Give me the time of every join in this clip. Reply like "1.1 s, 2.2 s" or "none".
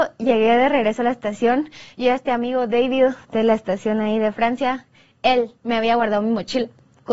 3.2 s